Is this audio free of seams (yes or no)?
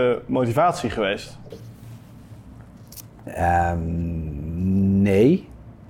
yes